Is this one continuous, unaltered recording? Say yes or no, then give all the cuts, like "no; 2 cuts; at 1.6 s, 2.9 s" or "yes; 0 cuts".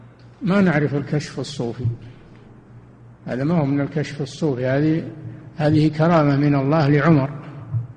yes; 0 cuts